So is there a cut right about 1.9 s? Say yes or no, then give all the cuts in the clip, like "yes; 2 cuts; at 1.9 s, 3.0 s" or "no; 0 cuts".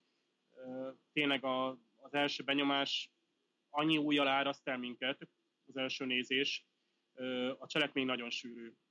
no; 0 cuts